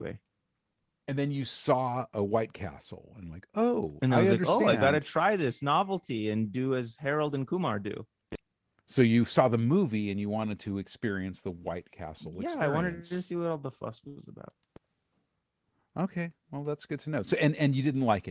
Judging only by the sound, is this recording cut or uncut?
uncut